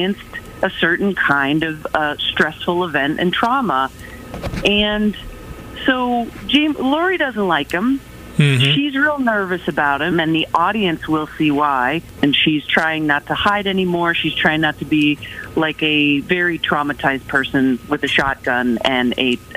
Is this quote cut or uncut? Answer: cut